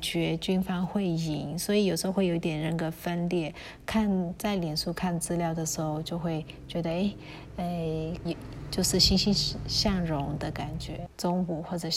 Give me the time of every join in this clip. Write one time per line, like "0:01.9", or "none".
0:08.3
0:11.1